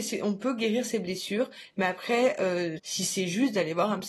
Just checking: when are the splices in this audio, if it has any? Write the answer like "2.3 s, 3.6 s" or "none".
1.7 s, 2.8 s